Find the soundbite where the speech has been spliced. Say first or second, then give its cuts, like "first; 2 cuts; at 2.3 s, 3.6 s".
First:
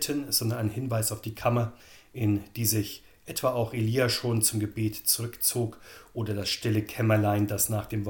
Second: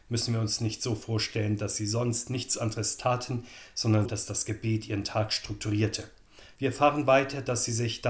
second; 2 cuts; at 4.0 s, 6.6 s